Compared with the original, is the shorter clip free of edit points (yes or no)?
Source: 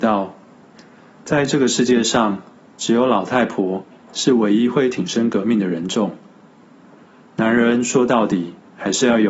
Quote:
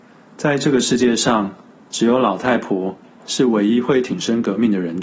yes